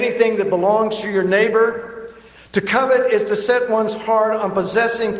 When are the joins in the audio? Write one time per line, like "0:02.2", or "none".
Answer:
0:02.4